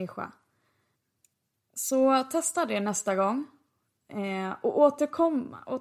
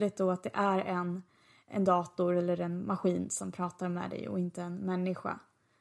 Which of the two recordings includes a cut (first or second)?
second